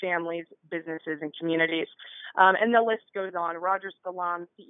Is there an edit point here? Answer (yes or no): no